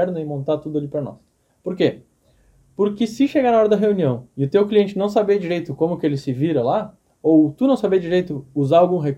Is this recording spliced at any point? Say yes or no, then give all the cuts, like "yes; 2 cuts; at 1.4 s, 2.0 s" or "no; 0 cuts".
yes; 1 cut; at 1.5 s